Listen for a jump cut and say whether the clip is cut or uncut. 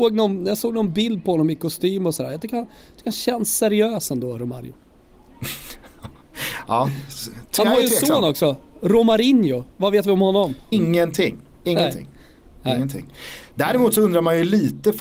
cut